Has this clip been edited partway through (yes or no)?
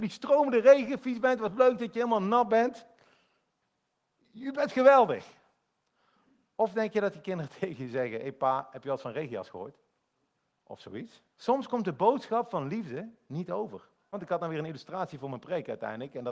yes